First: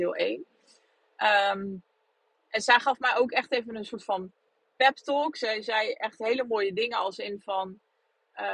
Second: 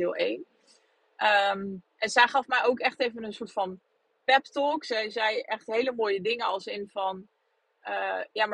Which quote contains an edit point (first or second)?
second